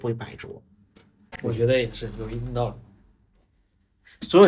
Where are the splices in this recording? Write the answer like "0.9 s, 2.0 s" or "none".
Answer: none